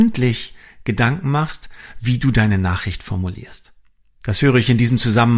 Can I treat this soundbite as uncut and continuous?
yes; 0 cuts

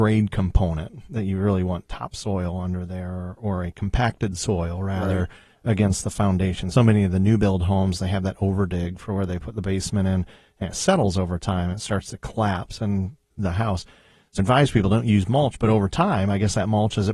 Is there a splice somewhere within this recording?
yes; 3 cuts; at 6.7 s, 13.3 s, 14.4 s

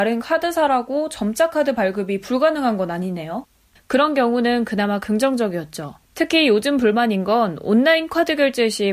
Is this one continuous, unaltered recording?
no; 2 cuts; at 3.8 s, 6.0 s

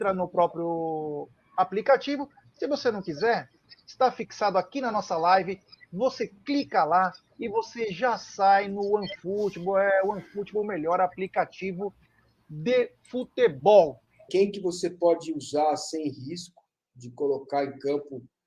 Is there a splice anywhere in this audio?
yes; 1 cut; at 14.3 s

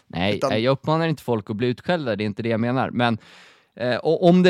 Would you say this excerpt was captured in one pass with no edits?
yes; 0 cuts

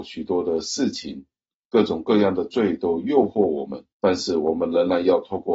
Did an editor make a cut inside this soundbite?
yes; 1 cut; at 3.9 s

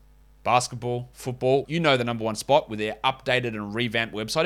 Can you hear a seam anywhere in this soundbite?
yes; 1 cut; at 1.6 s

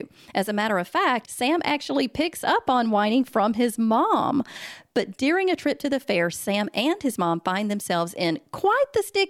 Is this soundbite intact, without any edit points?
no; 1 cut; at 1.2 s

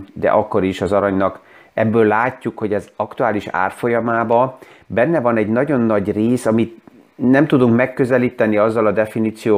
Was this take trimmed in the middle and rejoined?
no; 0 cuts

